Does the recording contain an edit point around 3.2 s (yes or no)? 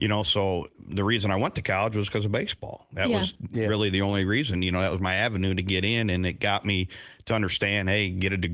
no